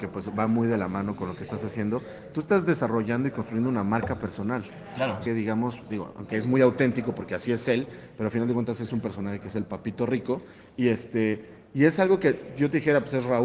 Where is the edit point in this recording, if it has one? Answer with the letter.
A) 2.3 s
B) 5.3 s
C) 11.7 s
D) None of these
B